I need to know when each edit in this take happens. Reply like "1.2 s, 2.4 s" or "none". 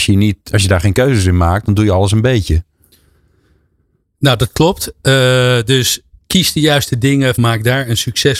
6.2 s, 7.3 s